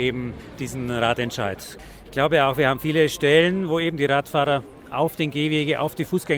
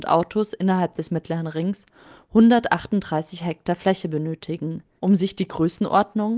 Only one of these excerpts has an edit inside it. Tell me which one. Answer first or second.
second